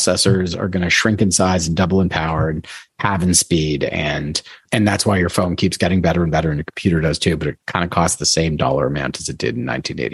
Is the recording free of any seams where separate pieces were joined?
no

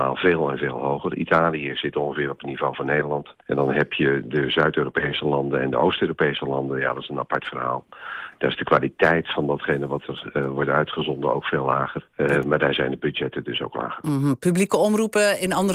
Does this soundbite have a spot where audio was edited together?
no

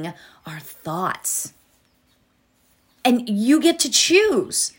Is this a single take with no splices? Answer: no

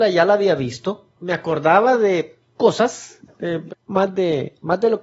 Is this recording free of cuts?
no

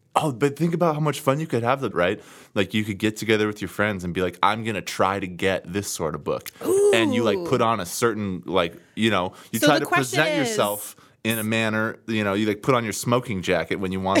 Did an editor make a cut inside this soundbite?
yes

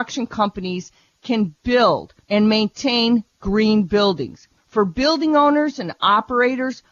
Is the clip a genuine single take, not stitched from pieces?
no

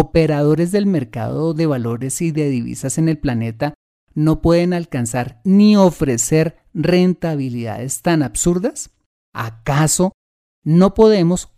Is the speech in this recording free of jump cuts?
yes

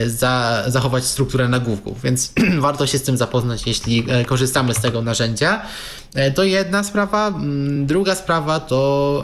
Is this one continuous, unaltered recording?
yes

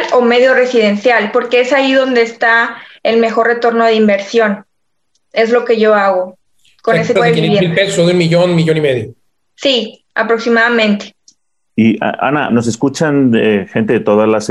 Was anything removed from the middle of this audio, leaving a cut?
yes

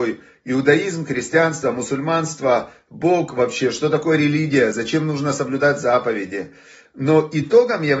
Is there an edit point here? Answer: no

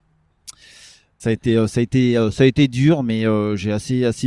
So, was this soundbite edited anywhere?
yes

